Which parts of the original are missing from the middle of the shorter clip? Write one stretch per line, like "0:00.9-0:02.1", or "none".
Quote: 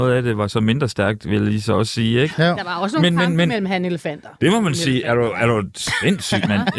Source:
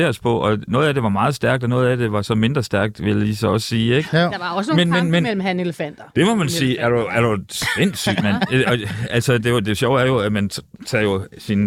none